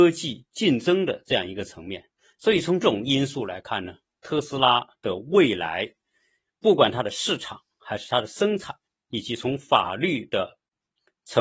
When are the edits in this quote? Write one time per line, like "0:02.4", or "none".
0:02.8